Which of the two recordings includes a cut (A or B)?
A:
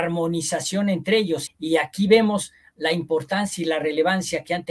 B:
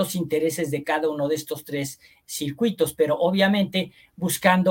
A